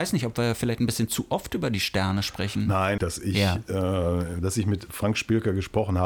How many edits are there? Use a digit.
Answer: 2